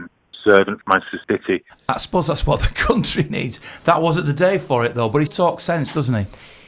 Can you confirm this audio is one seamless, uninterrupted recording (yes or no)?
no